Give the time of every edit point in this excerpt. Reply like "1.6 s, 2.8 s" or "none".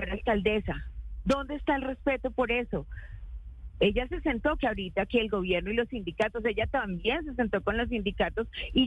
4.6 s